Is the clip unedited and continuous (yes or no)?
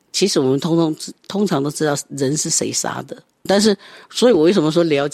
no